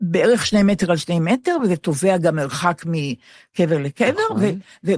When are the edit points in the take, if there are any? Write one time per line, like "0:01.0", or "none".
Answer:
none